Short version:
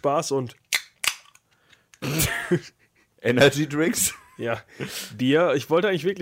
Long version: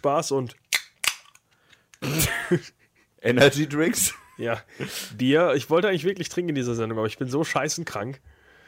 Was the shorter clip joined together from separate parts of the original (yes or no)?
no